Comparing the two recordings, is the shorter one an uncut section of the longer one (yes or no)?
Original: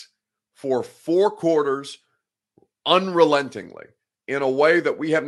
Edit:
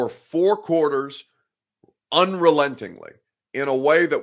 yes